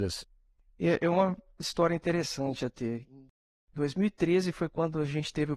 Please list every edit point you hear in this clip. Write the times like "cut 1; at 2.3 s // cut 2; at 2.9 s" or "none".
none